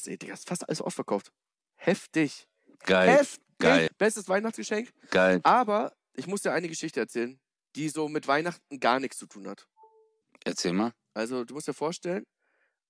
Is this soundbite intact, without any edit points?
no; 2 cuts; at 3.9 s, 7.6 s

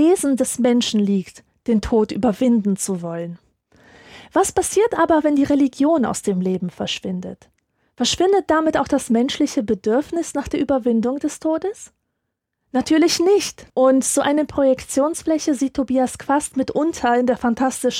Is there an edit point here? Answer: yes; 1 cut; at 13.7 s

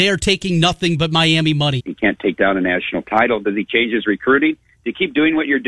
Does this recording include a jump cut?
yes; 1 cut; at 1.8 s

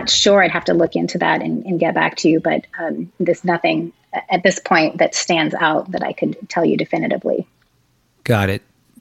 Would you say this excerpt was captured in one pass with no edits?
yes; 0 cuts

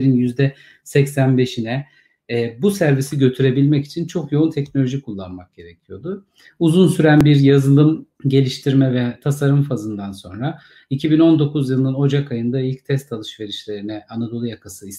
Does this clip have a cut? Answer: yes; 1 cut; at 8.1 s

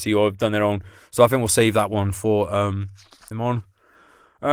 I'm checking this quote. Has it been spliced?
yes; 1 cut; at 3.3 s

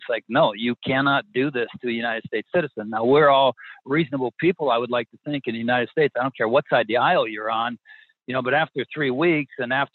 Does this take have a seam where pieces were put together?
no; 0 cuts

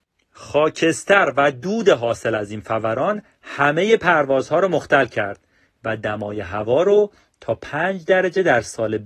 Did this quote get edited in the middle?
no; 0 cuts

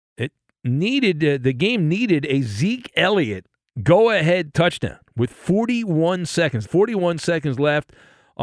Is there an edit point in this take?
yes; 1 cut; at 6.6 s

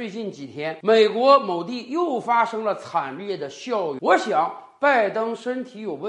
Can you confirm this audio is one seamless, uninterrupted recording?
no; 1 cut; at 4.0 s

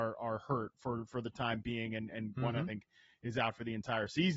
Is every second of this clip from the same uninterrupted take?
yes; 0 cuts

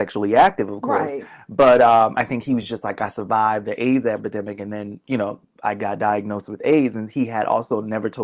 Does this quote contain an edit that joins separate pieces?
no; 0 cuts

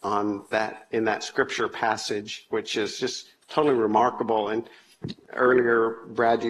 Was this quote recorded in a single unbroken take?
yes; 0 cuts

